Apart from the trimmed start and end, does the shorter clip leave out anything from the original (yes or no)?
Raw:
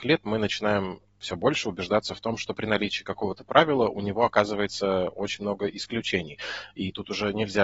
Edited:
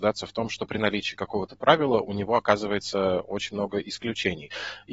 no